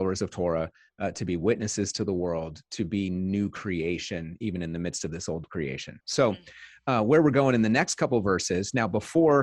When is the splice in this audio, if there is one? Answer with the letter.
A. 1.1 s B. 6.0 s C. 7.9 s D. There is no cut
B